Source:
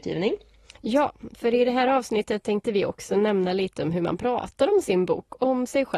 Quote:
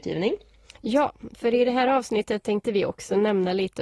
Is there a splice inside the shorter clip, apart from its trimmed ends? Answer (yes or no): no